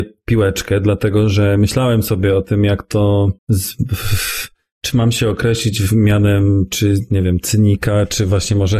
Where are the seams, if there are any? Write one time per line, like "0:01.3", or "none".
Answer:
0:03.4